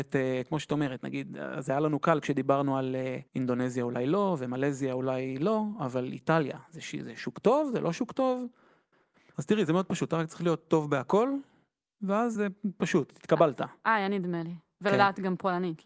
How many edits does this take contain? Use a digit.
3